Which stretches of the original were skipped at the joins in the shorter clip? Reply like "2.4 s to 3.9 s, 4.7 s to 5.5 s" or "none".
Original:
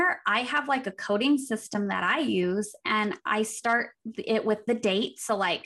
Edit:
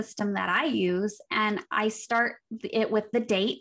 none